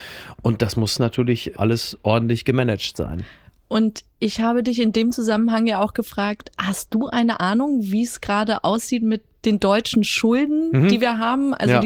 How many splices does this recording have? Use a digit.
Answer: 0